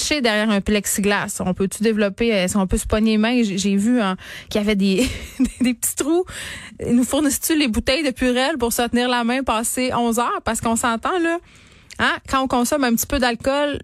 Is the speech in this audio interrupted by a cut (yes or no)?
no